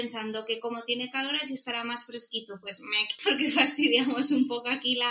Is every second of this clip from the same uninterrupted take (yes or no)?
no